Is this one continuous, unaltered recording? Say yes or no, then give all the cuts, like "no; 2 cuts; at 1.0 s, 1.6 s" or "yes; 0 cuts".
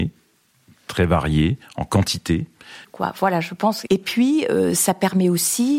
no; 2 cuts; at 2.8 s, 3.9 s